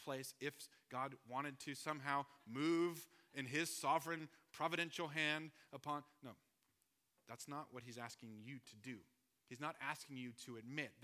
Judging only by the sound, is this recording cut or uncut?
uncut